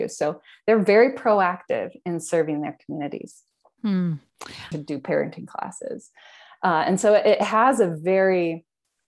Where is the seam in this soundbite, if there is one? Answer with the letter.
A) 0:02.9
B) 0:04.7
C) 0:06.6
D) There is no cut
B